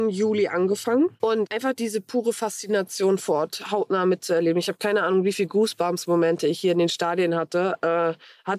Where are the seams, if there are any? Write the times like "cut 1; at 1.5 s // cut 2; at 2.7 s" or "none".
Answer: none